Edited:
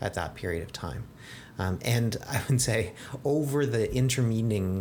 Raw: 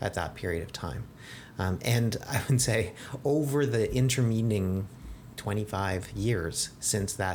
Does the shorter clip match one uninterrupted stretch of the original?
yes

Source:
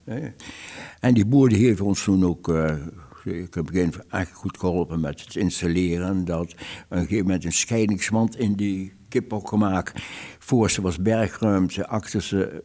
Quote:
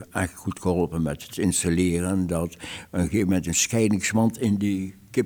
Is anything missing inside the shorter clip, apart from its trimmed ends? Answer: no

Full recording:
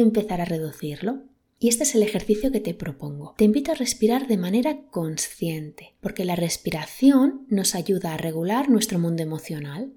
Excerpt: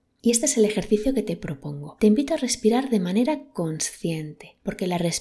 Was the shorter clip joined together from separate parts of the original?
no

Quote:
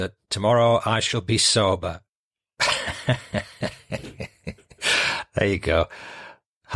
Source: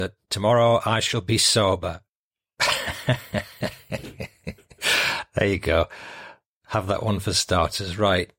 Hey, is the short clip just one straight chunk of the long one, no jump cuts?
yes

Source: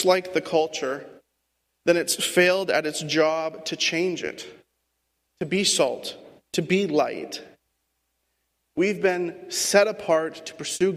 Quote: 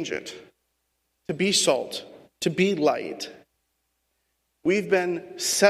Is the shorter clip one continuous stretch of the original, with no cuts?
yes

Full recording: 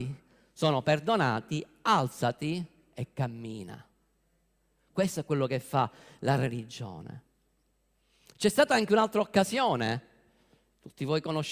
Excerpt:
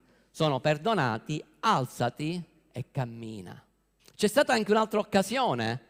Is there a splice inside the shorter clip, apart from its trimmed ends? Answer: yes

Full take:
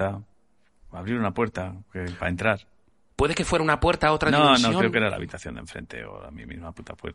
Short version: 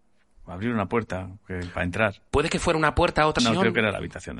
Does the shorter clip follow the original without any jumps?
no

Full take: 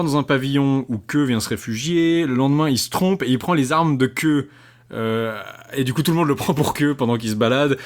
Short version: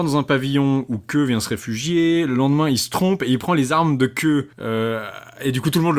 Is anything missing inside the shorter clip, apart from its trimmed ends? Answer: yes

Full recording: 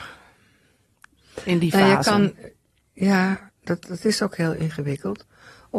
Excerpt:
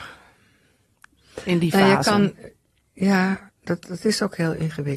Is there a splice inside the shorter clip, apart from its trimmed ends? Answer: no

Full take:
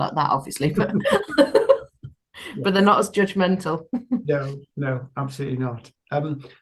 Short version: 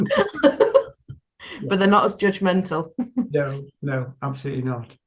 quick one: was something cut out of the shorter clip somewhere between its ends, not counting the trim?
no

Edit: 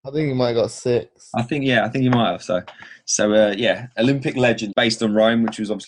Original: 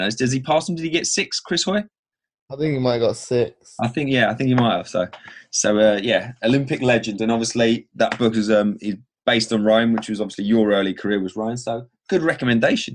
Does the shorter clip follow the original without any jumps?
no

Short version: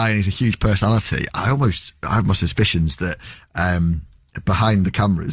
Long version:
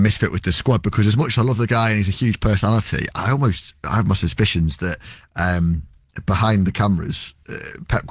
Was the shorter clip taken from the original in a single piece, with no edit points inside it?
yes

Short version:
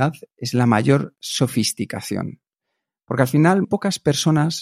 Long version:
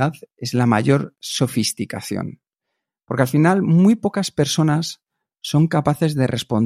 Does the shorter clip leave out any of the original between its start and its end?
yes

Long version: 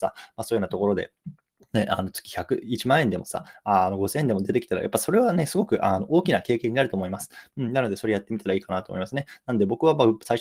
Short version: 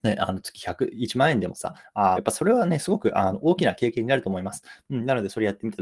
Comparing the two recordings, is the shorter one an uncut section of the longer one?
no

